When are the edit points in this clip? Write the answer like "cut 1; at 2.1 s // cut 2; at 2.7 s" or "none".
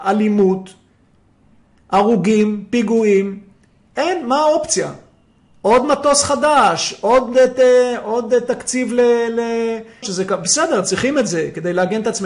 cut 1; at 10.0 s